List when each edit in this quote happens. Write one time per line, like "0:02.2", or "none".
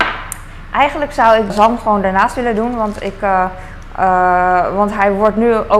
0:01.5